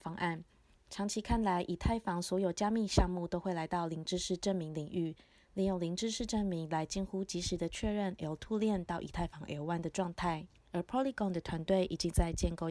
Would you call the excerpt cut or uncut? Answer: uncut